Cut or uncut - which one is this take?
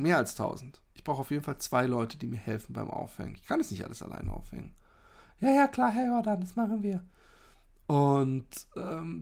uncut